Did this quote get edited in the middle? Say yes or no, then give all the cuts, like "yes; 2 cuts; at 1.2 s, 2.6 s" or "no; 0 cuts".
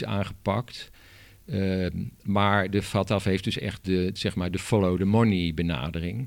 no; 0 cuts